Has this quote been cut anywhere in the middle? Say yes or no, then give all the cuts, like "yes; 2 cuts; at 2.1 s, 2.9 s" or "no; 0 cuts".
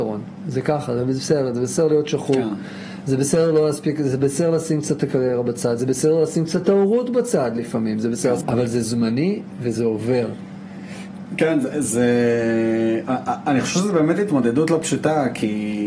yes; 1 cut; at 8.4 s